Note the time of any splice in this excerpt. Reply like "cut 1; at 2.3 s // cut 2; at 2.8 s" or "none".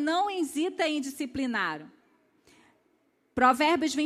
none